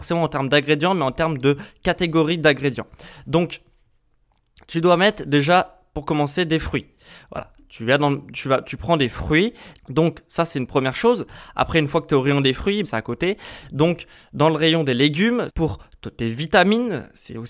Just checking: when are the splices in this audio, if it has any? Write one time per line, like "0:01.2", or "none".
0:09.8
0:12.8
0:15.5